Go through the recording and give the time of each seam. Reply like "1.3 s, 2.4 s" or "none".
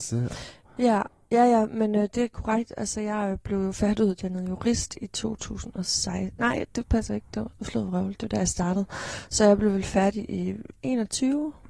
none